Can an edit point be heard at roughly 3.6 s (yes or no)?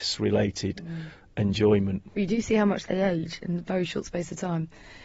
no